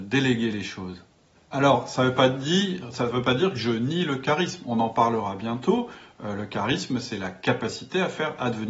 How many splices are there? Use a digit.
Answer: 0